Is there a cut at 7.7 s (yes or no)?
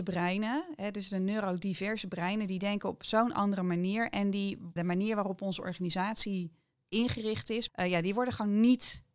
yes